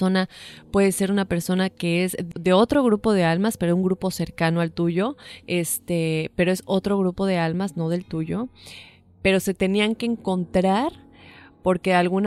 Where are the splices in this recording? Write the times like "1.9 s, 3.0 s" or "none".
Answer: 2.3 s, 5.4 s